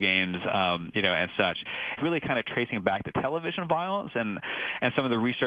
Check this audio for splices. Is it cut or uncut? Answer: cut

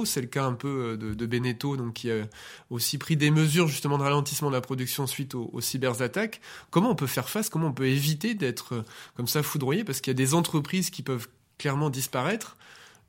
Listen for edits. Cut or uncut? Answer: uncut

